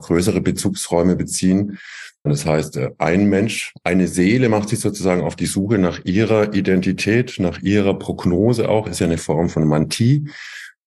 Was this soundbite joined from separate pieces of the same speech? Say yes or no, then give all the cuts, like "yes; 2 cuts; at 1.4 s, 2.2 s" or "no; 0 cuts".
yes; 1 cut; at 2.3 s